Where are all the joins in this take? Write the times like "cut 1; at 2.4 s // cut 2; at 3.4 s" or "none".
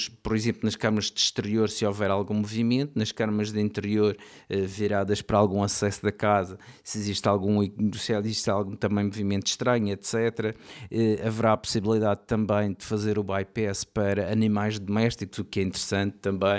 none